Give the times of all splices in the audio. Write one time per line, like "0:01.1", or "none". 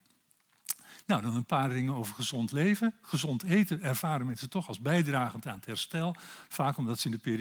none